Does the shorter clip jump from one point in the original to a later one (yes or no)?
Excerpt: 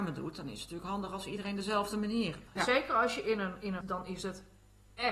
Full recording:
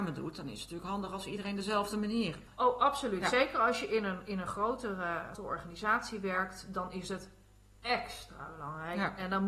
yes